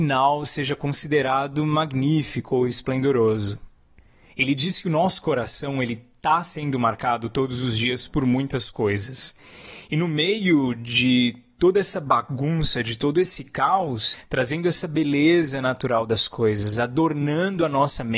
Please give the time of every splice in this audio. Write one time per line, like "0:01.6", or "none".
0:14.1